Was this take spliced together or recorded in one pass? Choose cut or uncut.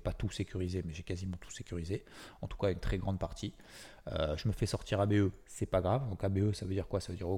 uncut